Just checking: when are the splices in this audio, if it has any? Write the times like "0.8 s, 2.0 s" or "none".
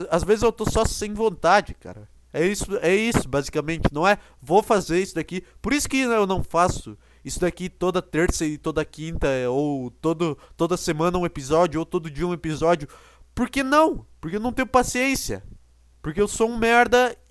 none